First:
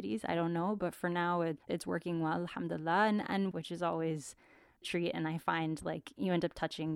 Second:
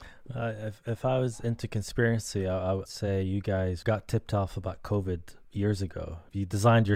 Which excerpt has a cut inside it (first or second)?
first